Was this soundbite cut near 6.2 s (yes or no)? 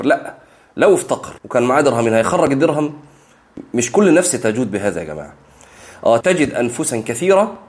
yes